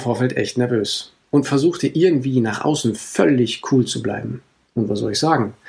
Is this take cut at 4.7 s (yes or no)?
yes